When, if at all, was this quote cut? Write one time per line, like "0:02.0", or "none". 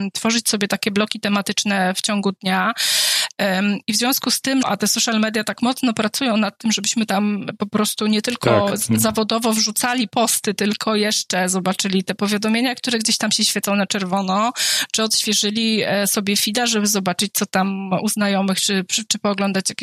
0:04.6

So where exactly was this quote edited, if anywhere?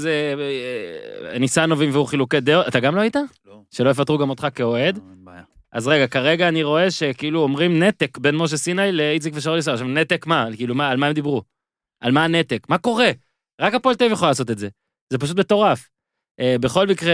none

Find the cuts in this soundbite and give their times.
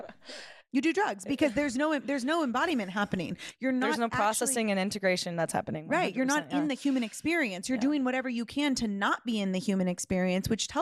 none

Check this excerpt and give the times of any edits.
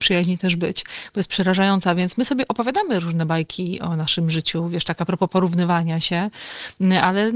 none

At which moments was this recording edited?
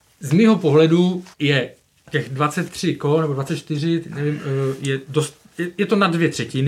0:01.3

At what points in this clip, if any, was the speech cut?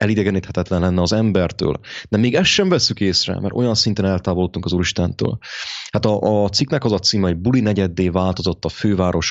none

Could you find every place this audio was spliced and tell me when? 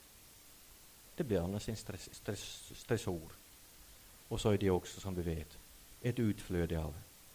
0:02.1

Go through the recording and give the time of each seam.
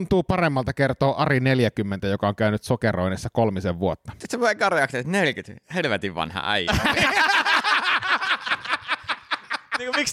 none

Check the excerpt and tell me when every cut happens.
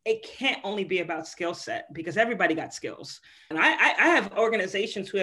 0:03.5

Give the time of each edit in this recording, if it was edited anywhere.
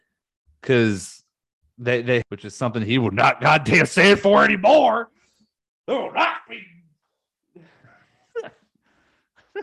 0:02.2

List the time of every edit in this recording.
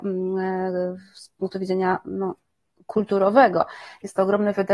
none

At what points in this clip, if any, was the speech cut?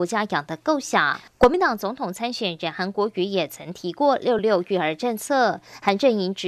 0:04.4

